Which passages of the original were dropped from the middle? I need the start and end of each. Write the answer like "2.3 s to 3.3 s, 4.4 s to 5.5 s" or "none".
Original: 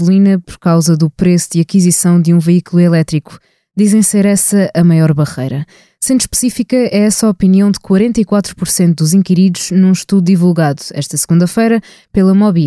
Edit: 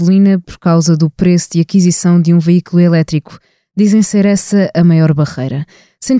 none